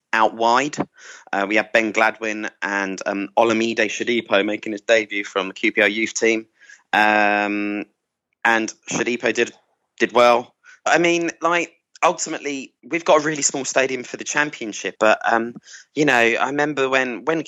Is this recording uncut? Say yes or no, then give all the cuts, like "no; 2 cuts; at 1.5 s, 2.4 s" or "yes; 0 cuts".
no; 3 cuts; at 10.9 s, 12.8 s, 14.9 s